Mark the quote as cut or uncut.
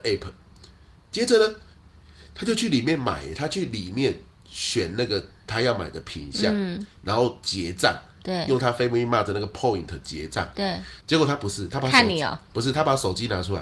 cut